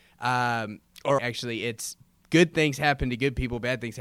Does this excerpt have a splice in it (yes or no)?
yes